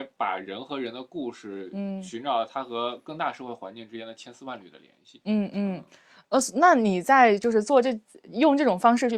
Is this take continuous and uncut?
yes; 0 cuts

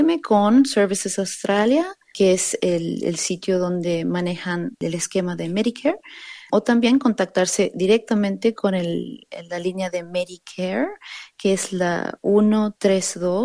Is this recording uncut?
yes; 0 cuts

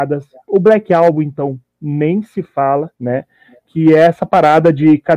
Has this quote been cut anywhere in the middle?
yes; 1 cut; at 2.9 s

